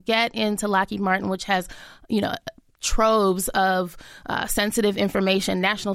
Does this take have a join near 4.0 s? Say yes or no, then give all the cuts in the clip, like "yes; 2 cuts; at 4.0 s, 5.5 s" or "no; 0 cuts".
no; 0 cuts